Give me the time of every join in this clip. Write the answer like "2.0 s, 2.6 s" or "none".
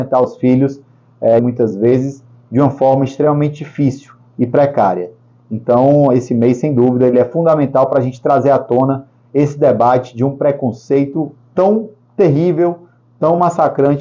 1.4 s